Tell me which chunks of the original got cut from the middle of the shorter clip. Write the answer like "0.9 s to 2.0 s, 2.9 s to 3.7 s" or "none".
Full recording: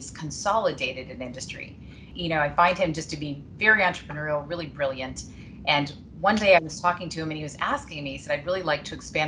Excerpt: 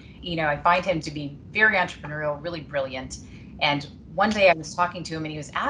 2.9 s to 3.1 s